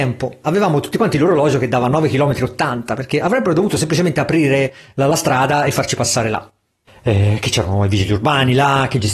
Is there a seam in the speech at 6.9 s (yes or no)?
yes